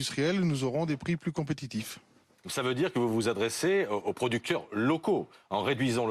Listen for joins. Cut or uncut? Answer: uncut